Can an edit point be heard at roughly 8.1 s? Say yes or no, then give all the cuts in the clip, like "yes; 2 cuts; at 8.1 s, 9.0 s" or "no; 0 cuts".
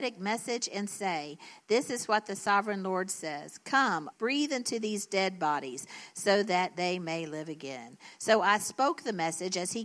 no; 1 cut; at 4.1 s